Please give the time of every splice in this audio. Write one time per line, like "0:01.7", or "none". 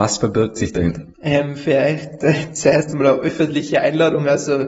0:01.1